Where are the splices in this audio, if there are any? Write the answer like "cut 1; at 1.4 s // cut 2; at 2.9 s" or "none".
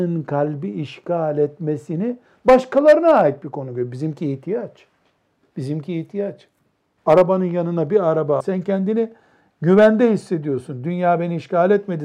cut 1; at 7.0 s // cut 2; at 8.4 s